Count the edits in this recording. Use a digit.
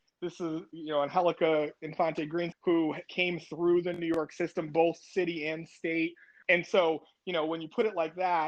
2